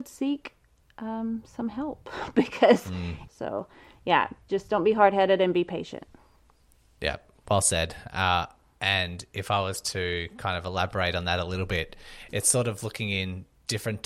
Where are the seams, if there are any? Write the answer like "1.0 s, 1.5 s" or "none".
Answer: 3.3 s